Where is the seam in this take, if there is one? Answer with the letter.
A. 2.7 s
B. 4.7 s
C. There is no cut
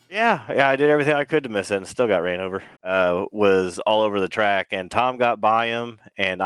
A